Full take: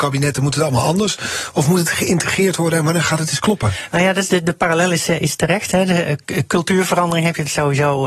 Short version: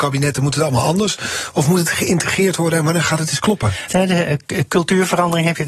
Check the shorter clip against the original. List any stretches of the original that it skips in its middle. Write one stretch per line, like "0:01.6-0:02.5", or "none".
0:03.9-0:05.7